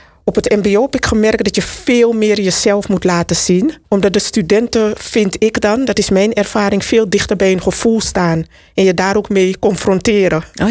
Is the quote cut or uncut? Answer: cut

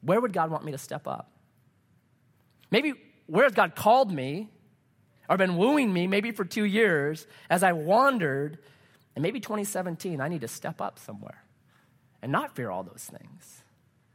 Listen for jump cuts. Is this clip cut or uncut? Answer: uncut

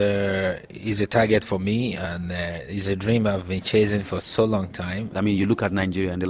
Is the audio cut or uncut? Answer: cut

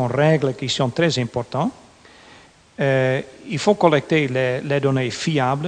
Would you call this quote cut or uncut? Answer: uncut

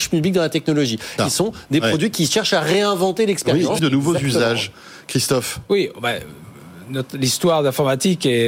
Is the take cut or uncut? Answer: cut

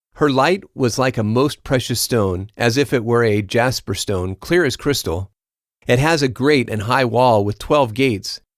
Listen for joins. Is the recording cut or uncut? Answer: uncut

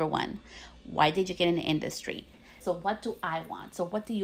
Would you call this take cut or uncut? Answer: cut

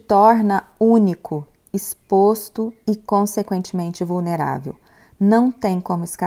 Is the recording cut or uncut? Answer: uncut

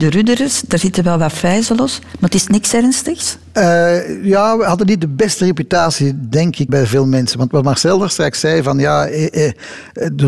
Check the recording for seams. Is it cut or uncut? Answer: cut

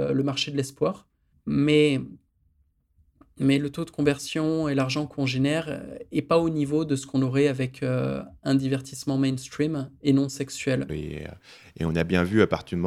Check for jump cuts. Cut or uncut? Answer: cut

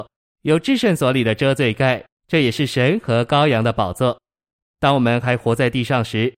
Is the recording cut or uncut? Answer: cut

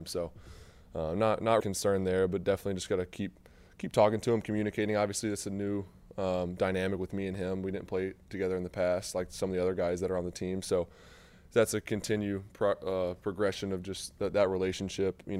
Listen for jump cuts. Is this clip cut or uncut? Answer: cut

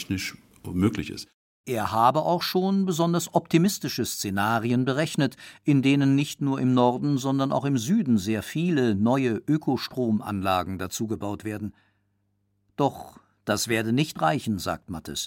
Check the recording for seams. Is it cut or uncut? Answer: uncut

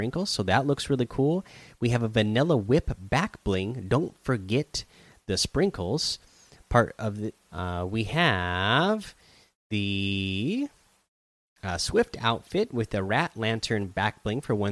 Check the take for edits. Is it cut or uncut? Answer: cut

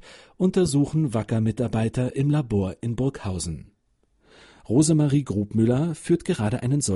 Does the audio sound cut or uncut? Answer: uncut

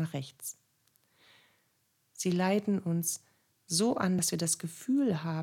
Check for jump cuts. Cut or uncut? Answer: uncut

